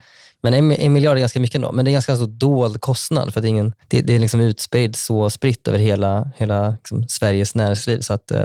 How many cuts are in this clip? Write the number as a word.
one